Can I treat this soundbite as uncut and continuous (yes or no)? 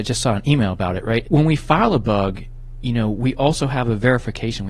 no